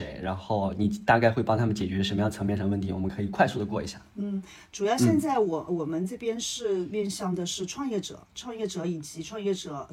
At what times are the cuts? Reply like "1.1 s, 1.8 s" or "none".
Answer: none